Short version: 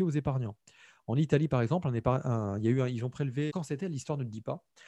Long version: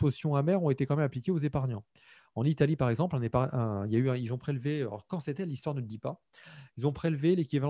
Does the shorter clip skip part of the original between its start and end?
yes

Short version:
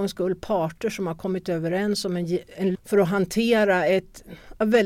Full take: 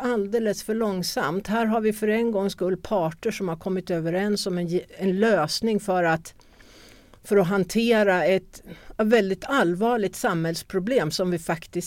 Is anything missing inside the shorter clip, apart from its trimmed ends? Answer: yes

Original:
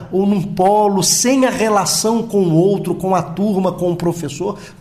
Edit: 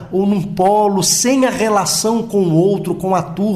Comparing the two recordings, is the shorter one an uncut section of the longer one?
yes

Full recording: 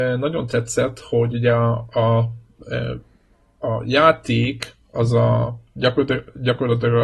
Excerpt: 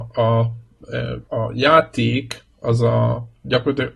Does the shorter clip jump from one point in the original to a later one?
yes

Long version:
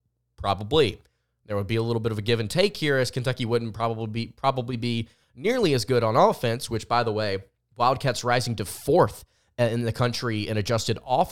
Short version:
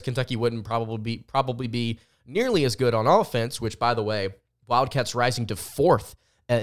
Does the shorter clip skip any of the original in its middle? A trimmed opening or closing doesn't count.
no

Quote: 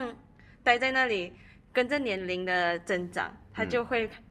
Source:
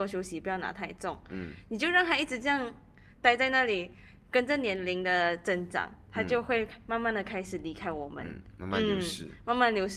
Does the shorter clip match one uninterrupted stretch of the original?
yes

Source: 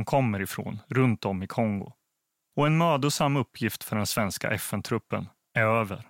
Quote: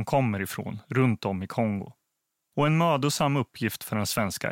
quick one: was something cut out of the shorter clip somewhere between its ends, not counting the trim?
no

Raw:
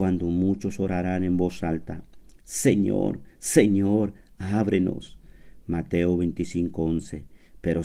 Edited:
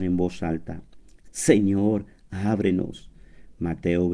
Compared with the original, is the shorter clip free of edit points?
no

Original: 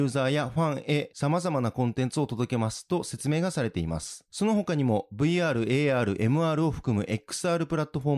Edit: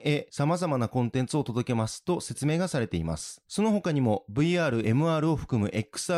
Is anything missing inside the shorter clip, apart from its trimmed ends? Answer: yes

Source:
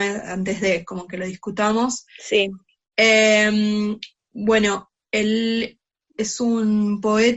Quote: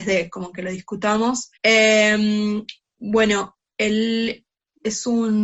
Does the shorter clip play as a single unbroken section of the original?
no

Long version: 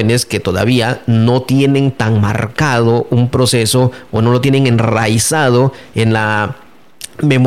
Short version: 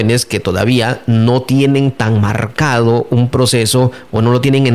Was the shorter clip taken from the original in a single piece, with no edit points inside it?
yes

